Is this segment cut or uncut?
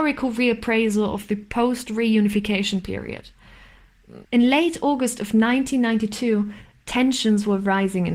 cut